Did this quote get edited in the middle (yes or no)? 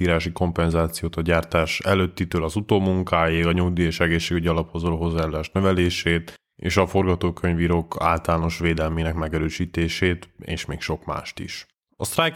no